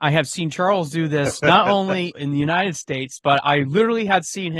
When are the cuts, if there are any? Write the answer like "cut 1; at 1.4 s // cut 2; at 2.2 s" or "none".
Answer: none

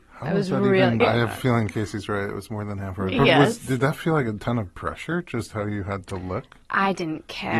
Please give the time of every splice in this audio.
cut 1; at 1.0 s

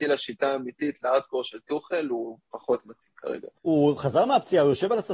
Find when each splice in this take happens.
cut 1; at 3.5 s

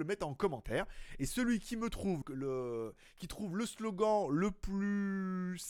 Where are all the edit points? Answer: cut 1; at 2.2 s

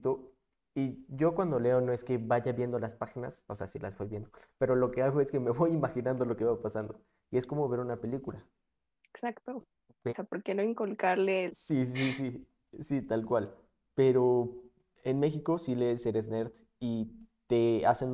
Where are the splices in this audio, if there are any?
cut 1; at 10.1 s // cut 2; at 11.5 s

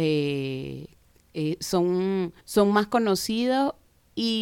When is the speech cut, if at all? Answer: cut 1; at 2.4 s

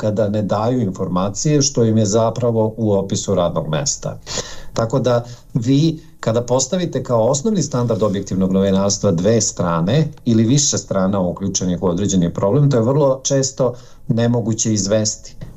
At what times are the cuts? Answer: none

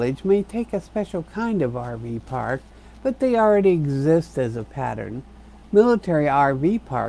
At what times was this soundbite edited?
none

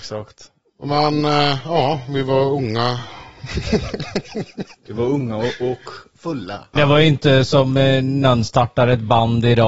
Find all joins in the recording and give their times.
cut 1; at 6.8 s

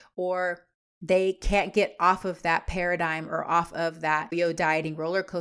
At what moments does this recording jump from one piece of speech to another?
cut 1; at 4.3 s

